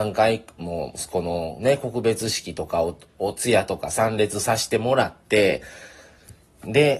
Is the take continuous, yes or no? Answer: yes